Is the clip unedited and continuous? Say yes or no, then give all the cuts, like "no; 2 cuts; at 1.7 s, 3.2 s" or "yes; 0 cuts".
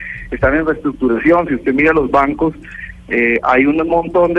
yes; 0 cuts